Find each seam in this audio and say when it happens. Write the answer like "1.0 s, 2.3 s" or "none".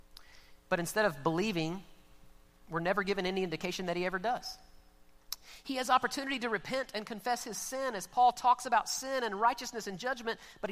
none